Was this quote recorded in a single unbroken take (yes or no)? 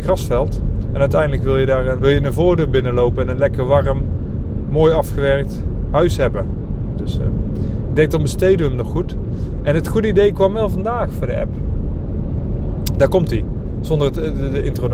no